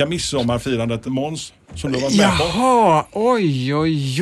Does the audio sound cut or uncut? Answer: cut